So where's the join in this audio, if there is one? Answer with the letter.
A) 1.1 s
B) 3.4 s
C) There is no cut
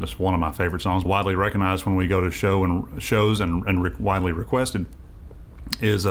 A